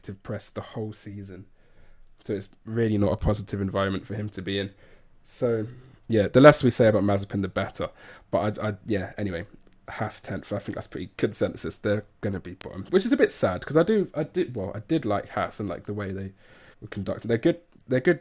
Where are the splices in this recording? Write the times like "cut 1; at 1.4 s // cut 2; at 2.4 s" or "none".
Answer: cut 1; at 11.1 s // cut 2; at 16.7 s